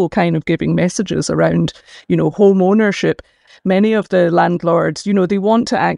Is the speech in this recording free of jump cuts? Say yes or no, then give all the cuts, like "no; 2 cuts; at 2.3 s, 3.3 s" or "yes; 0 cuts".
no; 1 cut; at 3.5 s